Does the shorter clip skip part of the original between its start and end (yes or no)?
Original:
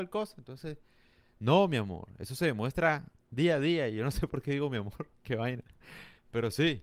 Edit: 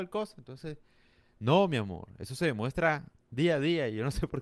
no